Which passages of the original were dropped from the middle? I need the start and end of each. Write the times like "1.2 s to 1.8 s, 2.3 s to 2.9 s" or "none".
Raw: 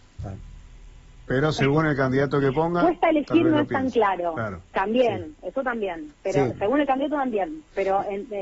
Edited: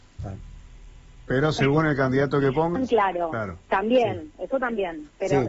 2.8 s to 3.8 s